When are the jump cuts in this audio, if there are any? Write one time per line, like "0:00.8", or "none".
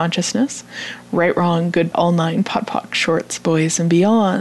0:01.9

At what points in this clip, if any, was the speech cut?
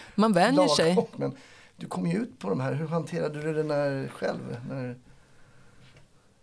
0:01.1

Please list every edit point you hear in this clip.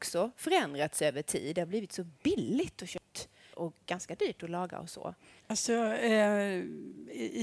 0:03.5
0:05.4

